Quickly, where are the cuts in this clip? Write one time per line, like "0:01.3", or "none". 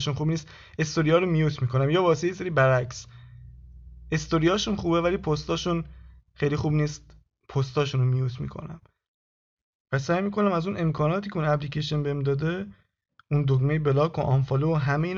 none